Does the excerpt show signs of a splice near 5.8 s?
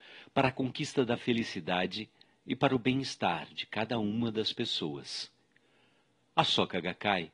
no; 0 cuts

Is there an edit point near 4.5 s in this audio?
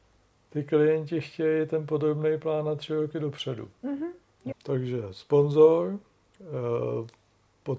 yes; 1 cut; at 4.5 s

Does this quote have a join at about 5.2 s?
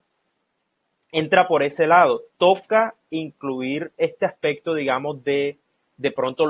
no; 0 cuts

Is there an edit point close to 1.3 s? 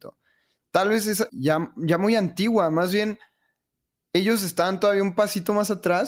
yes; 1 cut; at 1.3 s

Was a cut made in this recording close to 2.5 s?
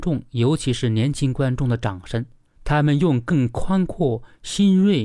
yes; 1 cut; at 2.5 s

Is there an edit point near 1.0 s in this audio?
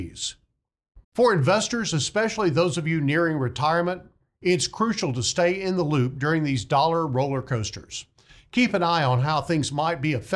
yes; 1 cut; at 1.0 s

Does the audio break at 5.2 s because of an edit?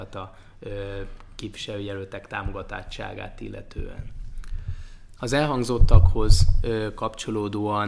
yes; 1 cut; at 5.2 s

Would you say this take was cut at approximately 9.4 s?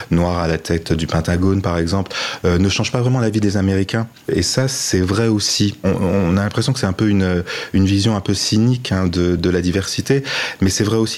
yes; 1 cut; at 9.4 s

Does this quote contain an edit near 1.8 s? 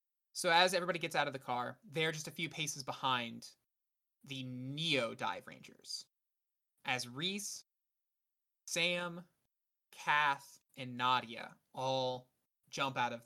yes; 1 cut; at 1.8 s

